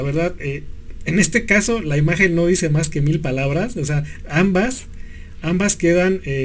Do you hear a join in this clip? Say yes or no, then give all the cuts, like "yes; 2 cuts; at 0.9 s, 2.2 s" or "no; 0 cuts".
no; 0 cuts